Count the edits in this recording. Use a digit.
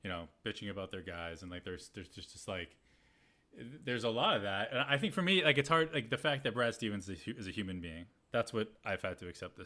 0